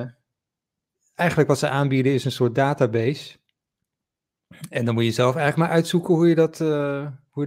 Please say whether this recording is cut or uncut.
uncut